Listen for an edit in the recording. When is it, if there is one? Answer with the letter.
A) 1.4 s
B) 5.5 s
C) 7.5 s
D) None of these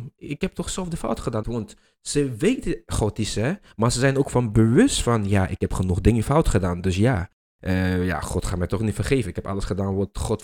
A